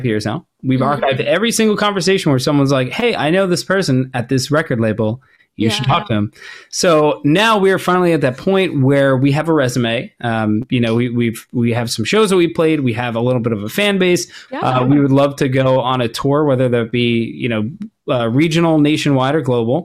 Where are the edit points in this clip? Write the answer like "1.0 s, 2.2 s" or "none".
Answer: 14.5 s